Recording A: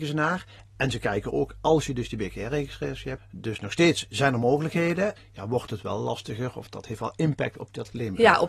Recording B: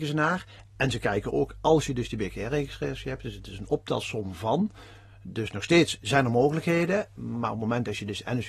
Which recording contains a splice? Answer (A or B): A